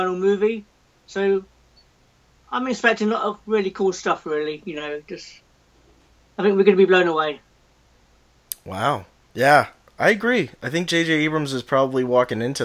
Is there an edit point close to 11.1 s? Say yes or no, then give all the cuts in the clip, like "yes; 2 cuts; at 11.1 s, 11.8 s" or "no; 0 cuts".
no; 0 cuts